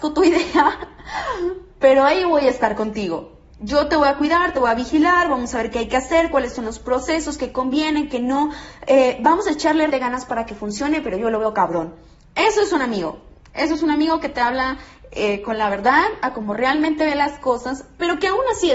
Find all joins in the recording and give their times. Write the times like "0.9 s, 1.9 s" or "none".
9.9 s